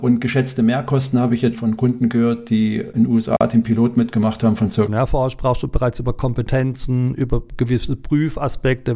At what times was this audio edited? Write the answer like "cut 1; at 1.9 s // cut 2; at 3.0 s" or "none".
cut 1; at 1.5 s // cut 2; at 4.9 s